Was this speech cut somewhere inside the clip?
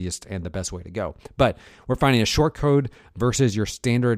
no; 0 cuts

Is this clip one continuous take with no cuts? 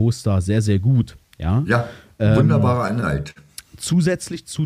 yes; 0 cuts

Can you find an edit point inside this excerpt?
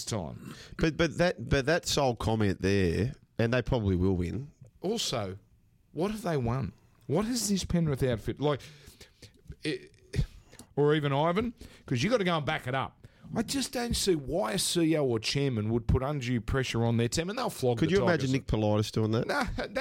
yes; 2 cuts; at 4.7 s, 10.6 s

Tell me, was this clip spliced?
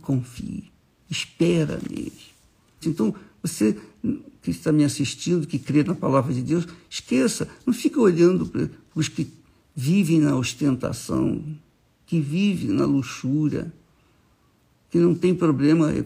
yes; 1 cut; at 2.8 s

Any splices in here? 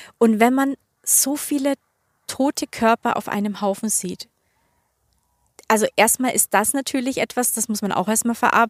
no; 0 cuts

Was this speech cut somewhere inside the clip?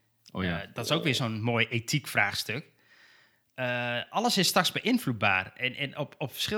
no; 0 cuts

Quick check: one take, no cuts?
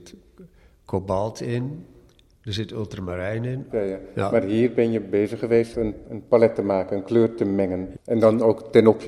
no; 3 cuts; at 3.7 s, 6.0 s, 7.9 s

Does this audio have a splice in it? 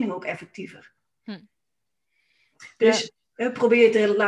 no; 0 cuts

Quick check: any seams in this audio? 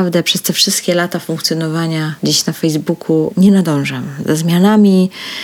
yes; 1 cut; at 2.2 s

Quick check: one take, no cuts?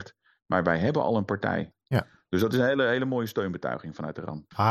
yes; 0 cuts

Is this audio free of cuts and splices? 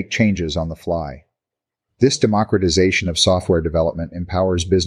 no; 1 cut; at 1.9 s

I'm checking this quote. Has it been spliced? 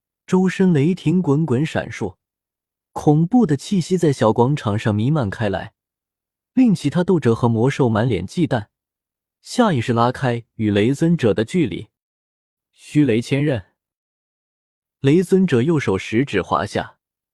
no; 0 cuts

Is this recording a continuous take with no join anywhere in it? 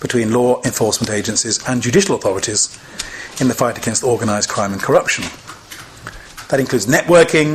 yes; 0 cuts

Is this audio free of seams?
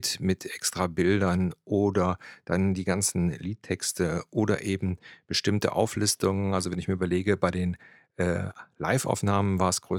yes; 0 cuts

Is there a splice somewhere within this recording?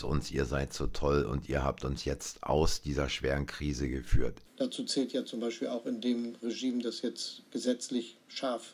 yes; 1 cut; at 4.4 s

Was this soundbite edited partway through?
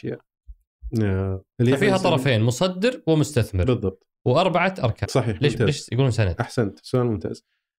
yes; 1 cut; at 5.0 s

